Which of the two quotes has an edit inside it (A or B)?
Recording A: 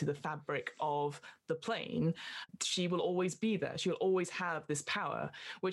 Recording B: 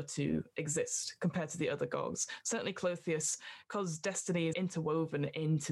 B